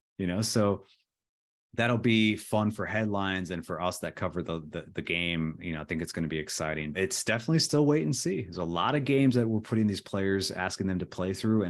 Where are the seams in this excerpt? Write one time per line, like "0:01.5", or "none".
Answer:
0:06.9